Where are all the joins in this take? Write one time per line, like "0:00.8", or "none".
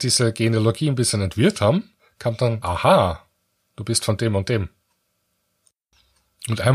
0:02.6